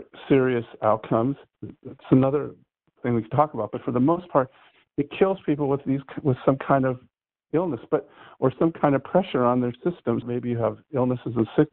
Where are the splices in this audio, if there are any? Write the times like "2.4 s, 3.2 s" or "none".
1.5 s, 10.2 s